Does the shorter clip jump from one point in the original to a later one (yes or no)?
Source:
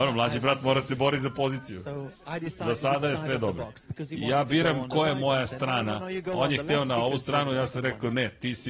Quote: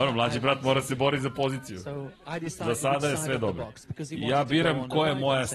no